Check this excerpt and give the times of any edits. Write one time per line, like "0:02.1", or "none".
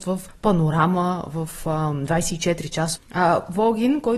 0:02.9